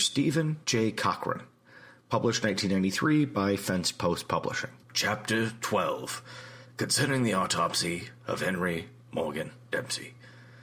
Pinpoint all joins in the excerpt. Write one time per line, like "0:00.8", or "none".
0:04.8